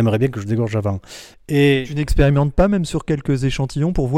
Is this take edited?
yes; 1 cut; at 1.3 s

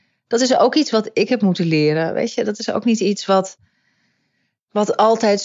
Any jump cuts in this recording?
no; 0 cuts

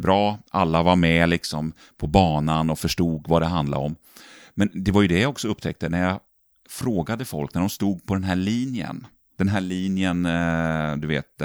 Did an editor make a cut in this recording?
no; 0 cuts

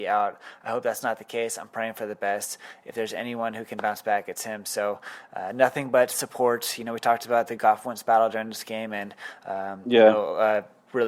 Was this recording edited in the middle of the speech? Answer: no; 0 cuts

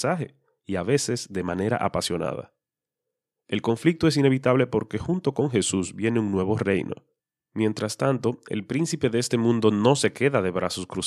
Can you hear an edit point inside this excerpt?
no; 0 cuts

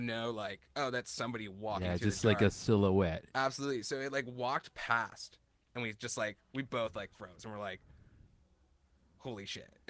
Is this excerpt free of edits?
yes; 0 cuts

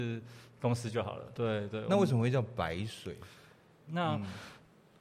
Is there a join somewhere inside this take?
yes; 2 cuts; at 1.3 s, 3.9 s

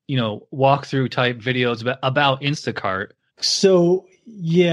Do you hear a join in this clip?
yes; 1 cut; at 3.3 s

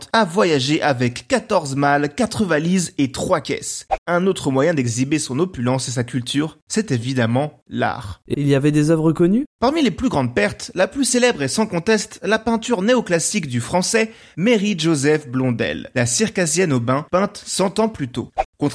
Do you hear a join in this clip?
yes; 2 cuts; at 8.3 s, 17.1 s

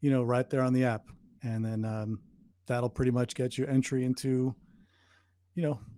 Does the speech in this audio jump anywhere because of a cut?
no; 0 cuts

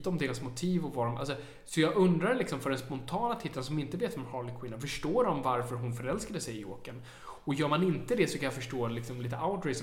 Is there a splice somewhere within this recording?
no; 0 cuts

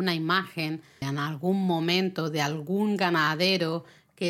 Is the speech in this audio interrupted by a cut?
yes; 1 cut; at 1.0 s

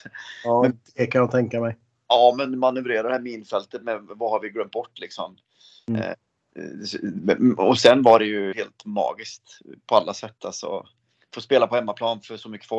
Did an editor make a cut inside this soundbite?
yes; 1 cut; at 8.5 s

